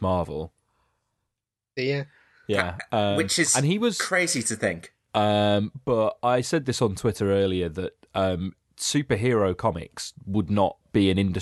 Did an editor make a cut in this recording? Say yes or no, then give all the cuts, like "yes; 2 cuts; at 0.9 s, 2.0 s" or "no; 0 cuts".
yes; 2 cuts; at 1.8 s, 5.1 s